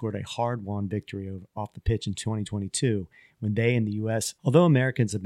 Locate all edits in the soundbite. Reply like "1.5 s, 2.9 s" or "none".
4.3 s